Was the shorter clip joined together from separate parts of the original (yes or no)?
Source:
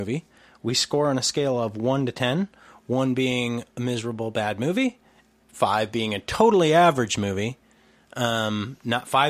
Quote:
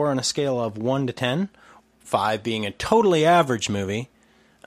yes